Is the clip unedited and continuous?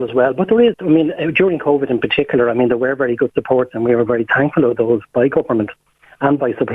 yes; 0 cuts

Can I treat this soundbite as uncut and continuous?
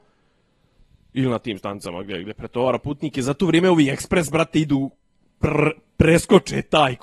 yes; 0 cuts

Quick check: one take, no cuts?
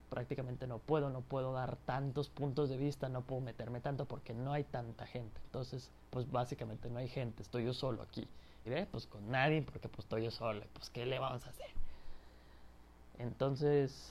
no; 1 cut; at 8.6 s

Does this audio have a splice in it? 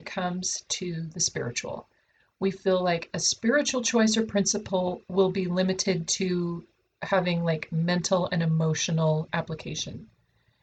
no; 0 cuts

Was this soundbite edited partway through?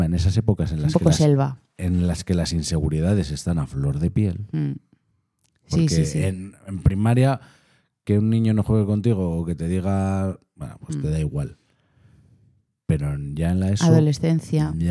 no; 0 cuts

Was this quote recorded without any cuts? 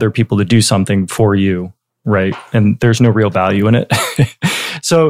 yes; 0 cuts

